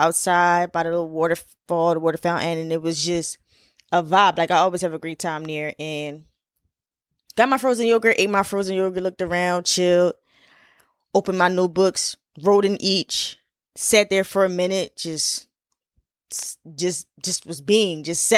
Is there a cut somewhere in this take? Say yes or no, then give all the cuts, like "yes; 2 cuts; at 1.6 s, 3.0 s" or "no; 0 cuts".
no; 0 cuts